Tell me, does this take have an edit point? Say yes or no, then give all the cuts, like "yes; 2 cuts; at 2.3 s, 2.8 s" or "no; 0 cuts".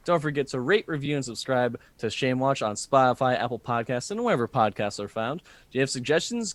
no; 0 cuts